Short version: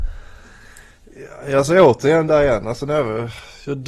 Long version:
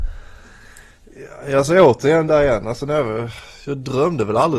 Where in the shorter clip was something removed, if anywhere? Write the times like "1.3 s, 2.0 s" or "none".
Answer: none

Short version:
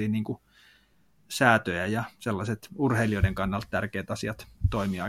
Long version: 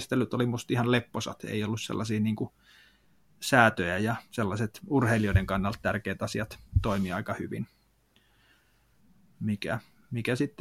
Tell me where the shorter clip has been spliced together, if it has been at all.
none

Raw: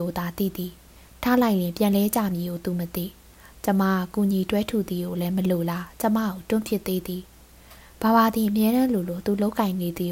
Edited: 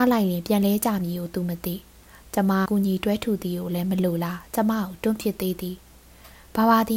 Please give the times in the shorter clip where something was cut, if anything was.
2.7 s

